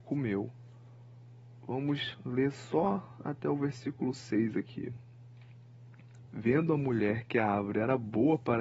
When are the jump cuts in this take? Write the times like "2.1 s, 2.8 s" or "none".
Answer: 6.3 s